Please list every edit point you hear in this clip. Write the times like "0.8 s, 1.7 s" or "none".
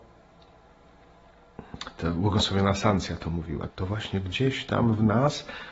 3.7 s